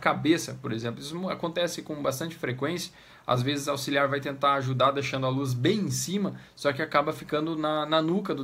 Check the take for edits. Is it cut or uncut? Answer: uncut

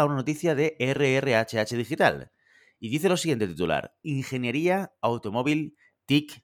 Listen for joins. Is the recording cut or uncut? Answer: uncut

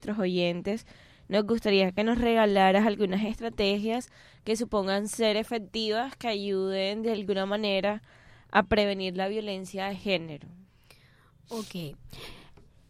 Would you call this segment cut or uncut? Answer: uncut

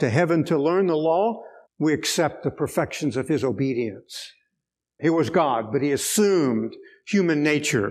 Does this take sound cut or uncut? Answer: cut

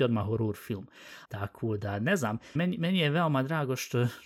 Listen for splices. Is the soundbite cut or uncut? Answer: cut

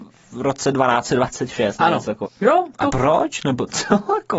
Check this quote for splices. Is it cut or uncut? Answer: cut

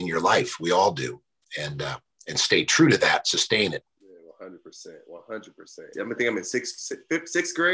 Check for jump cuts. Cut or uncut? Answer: cut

